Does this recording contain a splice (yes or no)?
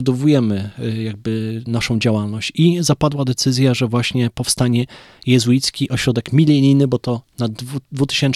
no